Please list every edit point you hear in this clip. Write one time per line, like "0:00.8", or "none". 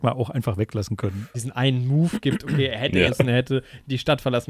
0:01.3
0:03.1